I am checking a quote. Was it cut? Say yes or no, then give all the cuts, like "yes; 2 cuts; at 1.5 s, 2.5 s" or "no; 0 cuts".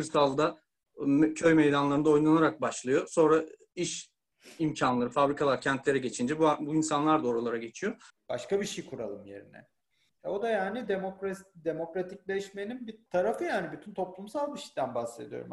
yes; 3 cuts; at 8.1 s, 10.1 s, 13.1 s